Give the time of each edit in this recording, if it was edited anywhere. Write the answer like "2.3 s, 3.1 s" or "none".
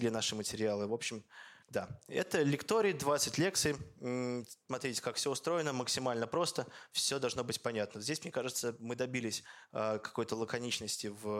1.6 s

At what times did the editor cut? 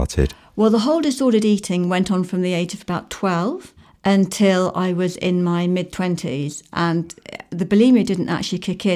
none

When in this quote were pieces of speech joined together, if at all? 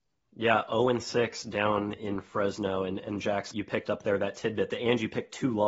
3.5 s

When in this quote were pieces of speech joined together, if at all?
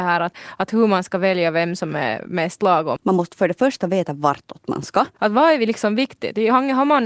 3.0 s, 5.2 s

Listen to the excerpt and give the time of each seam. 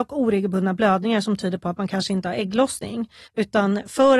3.3 s

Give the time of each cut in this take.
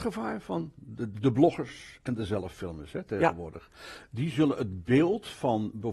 1.1 s

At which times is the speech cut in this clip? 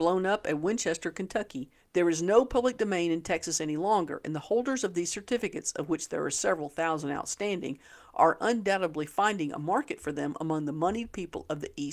1.8 s

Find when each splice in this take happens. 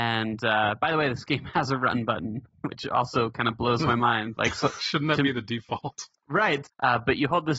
6.6 s

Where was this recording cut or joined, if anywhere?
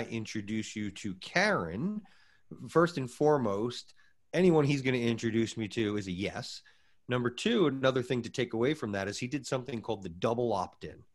none

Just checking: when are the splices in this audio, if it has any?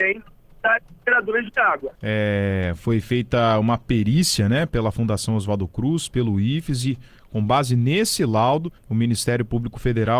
1.9 s, 8.8 s

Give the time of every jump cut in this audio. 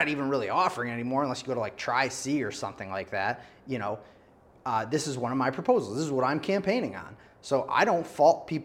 none

